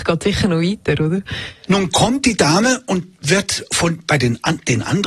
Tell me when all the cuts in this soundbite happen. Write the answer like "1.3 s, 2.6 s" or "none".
none